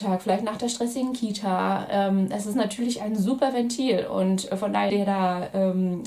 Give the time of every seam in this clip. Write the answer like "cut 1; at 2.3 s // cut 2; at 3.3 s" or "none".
cut 1; at 4.9 s